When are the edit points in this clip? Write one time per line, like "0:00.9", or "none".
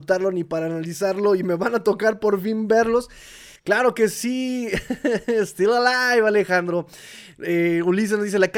0:03.6